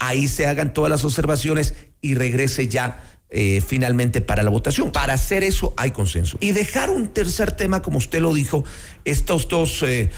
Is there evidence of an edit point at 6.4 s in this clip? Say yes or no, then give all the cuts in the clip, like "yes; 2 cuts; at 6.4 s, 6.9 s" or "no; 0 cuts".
yes; 2 cuts; at 4.9 s, 6.4 s